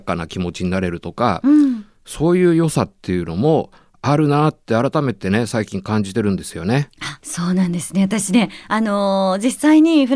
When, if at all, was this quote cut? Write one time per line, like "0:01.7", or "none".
0:07.2